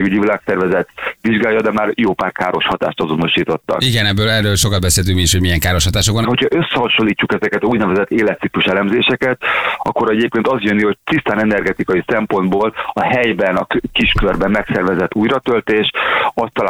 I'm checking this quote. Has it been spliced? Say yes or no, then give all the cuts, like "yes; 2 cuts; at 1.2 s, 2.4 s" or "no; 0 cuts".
yes; 1 cut; at 6.2 s